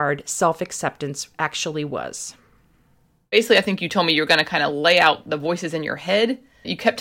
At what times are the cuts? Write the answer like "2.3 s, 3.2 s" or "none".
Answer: none